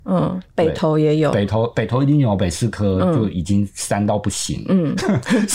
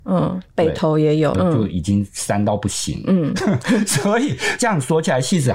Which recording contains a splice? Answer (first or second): second